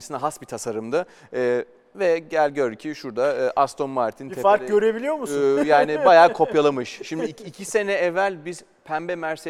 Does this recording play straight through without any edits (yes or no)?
yes